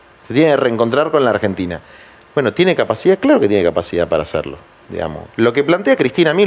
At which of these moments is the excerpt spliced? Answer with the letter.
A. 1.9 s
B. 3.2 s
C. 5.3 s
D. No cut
C